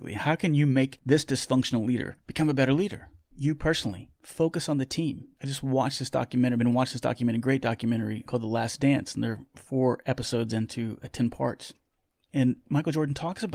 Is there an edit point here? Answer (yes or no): yes